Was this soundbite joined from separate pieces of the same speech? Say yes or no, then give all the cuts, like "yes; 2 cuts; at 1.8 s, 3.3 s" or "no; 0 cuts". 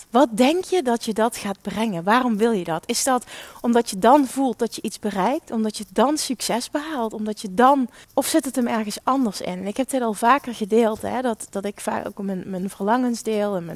yes; 1 cut; at 8.0 s